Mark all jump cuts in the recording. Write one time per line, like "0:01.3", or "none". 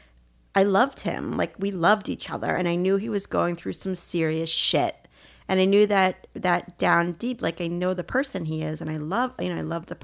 none